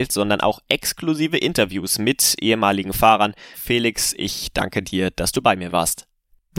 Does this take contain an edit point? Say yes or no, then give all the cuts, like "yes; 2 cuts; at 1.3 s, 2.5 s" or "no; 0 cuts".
yes; 1 cut; at 3.5 s